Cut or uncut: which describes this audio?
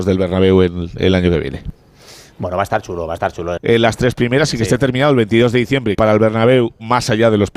cut